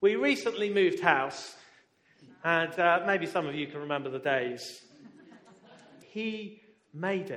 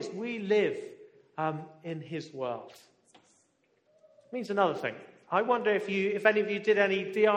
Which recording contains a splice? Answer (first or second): first